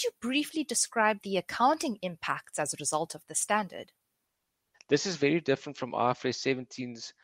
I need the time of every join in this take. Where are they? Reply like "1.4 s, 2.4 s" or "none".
4.7 s